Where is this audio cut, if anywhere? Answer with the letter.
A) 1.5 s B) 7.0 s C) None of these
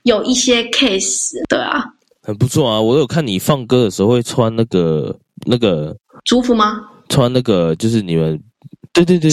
C